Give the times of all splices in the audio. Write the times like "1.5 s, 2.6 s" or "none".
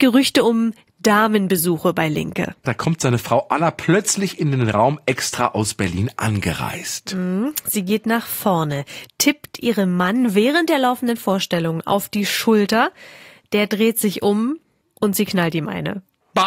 2.6 s